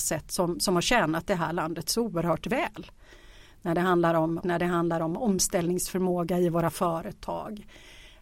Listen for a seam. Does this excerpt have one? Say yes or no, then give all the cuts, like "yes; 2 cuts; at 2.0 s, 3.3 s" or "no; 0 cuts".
yes; 1 cut; at 4.4 s